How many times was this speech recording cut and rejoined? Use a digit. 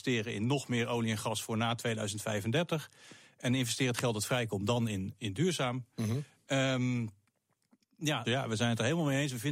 1